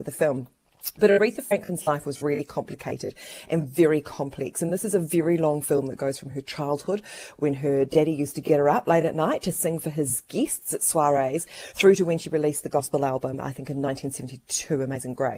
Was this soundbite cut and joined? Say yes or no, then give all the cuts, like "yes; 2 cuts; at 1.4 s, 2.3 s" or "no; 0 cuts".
no; 0 cuts